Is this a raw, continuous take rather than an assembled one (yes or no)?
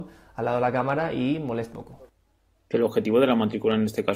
no